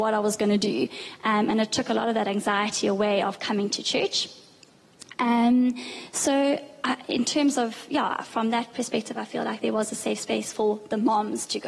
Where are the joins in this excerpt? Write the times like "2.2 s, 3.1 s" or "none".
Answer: 1.2 s